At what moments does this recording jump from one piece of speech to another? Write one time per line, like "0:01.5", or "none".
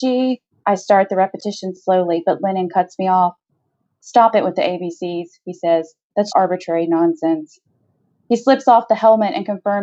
0:06.3